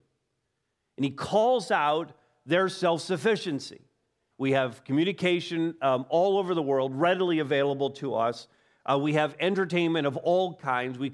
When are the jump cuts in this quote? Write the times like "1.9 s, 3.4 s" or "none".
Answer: 4.3 s